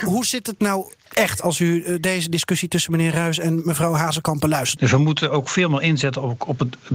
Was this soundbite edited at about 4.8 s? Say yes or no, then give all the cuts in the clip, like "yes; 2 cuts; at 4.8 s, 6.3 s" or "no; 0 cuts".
yes; 1 cut; at 4.8 s